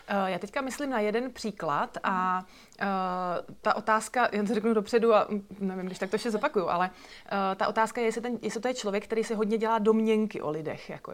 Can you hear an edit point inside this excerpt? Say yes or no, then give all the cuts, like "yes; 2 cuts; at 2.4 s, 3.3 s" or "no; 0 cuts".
no; 0 cuts